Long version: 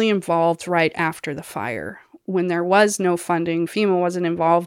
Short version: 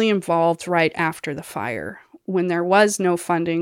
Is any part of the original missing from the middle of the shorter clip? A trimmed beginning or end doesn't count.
no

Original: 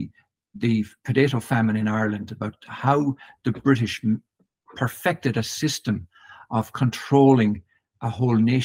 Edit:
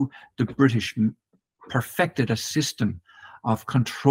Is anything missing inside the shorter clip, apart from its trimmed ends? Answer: no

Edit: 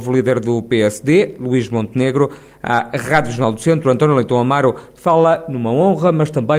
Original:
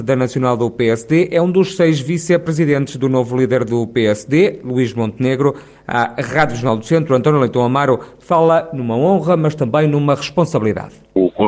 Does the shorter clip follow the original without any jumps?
yes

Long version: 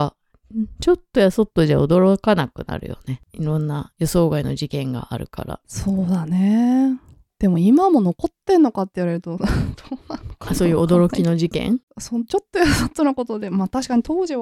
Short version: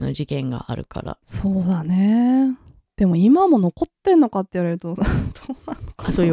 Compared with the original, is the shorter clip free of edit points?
yes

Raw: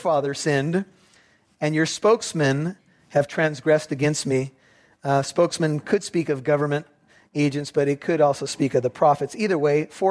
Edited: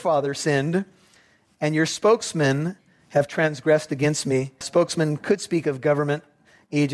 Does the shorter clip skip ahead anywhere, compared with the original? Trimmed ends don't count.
yes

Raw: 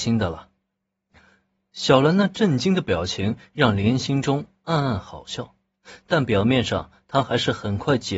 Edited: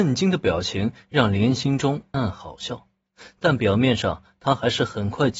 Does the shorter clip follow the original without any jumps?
no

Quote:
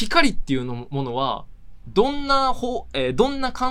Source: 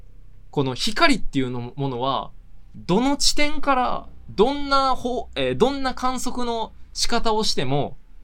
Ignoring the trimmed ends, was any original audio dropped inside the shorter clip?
yes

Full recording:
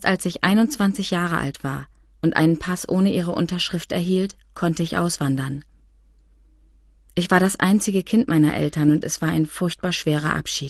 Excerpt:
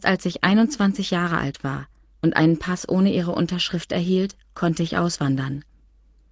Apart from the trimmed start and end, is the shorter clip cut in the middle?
no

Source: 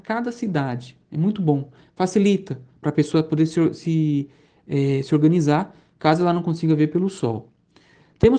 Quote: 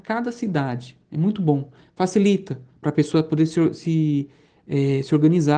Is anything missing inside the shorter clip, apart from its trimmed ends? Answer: no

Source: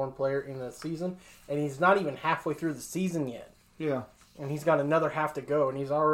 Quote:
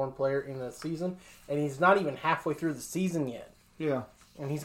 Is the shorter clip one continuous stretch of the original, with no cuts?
yes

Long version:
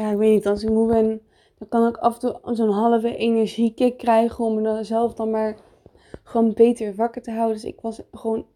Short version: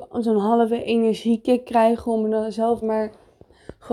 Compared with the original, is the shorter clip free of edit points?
no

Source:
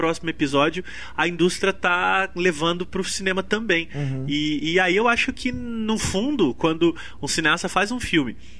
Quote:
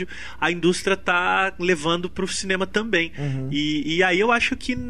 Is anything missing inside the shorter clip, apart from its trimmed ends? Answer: no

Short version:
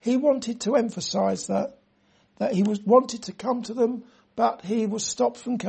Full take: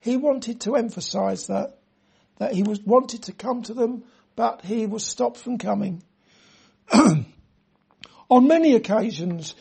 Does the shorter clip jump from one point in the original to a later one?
no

